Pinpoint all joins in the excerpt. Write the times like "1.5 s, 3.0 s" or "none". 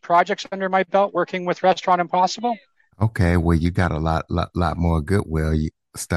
2.9 s